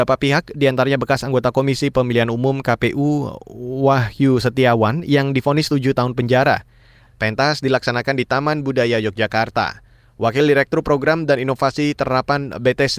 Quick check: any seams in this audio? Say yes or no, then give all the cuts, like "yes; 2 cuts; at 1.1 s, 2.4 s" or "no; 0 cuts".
yes; 1 cut; at 7.1 s